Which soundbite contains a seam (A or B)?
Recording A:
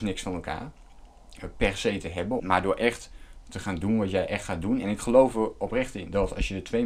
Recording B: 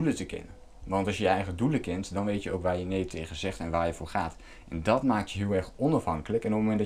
A